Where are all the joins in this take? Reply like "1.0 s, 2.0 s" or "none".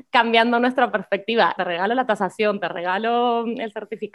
1.6 s